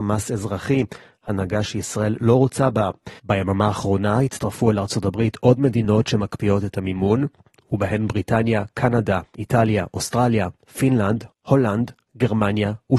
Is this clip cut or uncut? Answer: cut